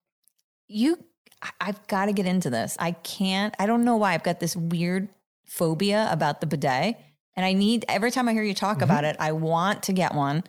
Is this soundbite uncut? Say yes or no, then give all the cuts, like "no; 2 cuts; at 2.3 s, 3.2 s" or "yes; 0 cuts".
yes; 0 cuts